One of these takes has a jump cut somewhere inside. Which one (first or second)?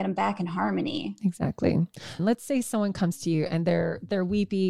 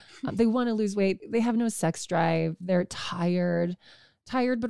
first